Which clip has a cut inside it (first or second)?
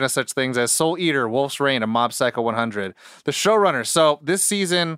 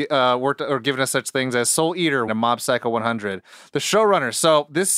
second